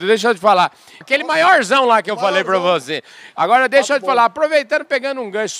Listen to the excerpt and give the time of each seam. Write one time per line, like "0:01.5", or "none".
0:01.0